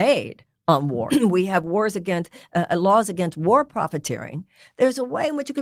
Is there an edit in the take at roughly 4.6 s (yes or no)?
no